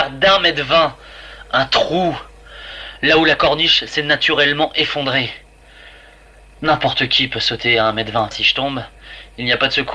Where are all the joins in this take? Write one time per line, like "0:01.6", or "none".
0:08.3